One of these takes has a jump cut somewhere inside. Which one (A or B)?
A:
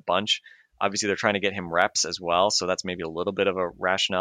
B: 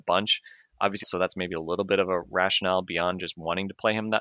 B